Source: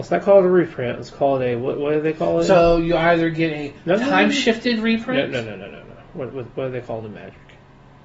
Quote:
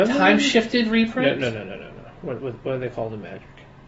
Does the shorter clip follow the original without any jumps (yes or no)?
yes